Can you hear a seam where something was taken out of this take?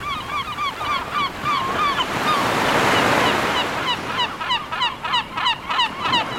no; 0 cuts

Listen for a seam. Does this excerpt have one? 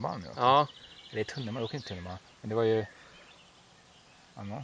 no; 0 cuts

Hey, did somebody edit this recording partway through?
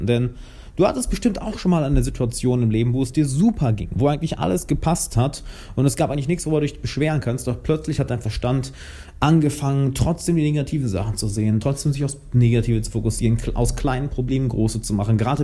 no; 0 cuts

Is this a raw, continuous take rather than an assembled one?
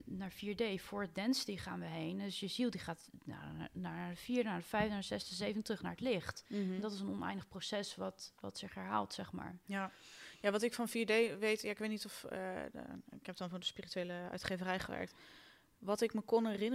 yes; 0 cuts

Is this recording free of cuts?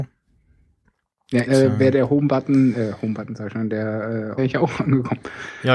no; 2 cuts; at 1.5 s, 4.4 s

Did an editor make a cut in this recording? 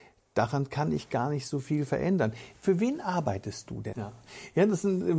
yes; 1 cut; at 3.9 s

